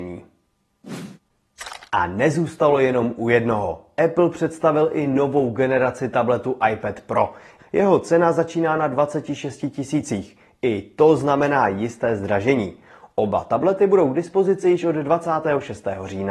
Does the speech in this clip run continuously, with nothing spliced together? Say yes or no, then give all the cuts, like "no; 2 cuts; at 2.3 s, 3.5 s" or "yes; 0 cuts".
no; 1 cut; at 7.6 s